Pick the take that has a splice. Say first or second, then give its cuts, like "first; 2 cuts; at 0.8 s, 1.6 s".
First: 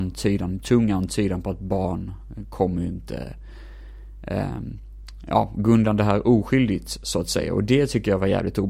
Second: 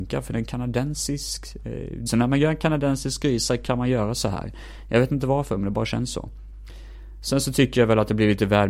second; 1 cut; at 2.1 s